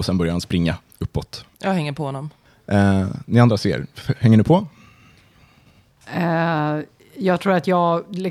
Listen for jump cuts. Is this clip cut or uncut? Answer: cut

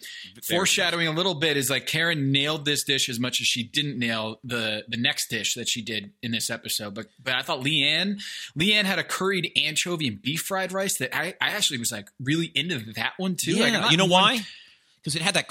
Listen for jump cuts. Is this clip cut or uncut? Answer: uncut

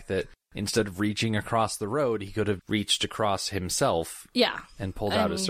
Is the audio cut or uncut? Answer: cut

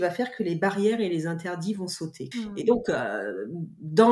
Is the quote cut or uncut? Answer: cut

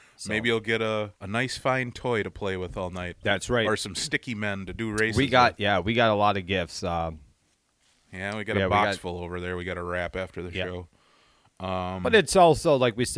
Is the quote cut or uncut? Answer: cut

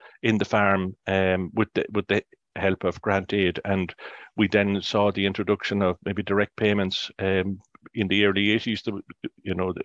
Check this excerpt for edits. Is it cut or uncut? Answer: uncut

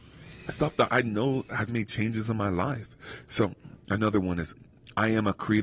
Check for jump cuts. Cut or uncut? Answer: cut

